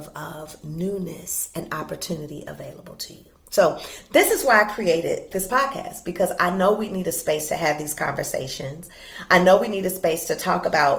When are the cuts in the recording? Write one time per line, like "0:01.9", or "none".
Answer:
none

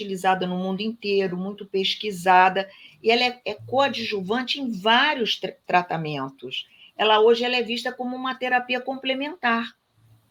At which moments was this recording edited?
none

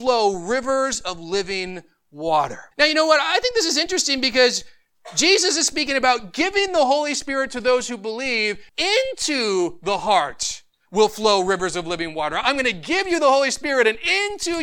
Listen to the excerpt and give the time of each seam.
0:02.7
0:08.7

